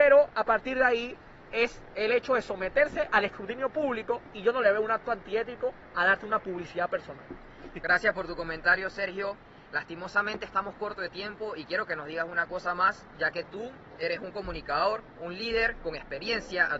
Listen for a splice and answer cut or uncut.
uncut